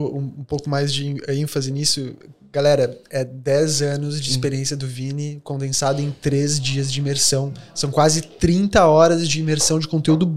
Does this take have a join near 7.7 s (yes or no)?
no